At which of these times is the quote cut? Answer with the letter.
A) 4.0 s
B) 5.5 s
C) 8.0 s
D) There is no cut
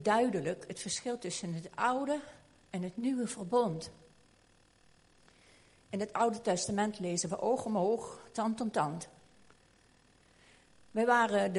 D